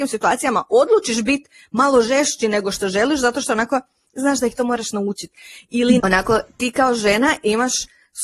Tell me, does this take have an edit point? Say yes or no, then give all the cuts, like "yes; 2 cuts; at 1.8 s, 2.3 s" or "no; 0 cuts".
yes; 1 cut; at 6.0 s